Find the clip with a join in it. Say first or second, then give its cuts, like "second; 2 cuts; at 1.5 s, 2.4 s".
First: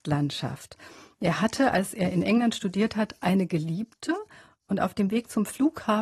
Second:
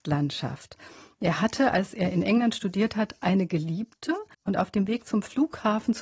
second; 1 cut; at 4.3 s